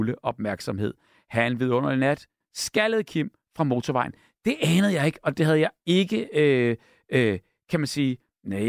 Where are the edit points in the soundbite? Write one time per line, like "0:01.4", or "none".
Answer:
0:02.4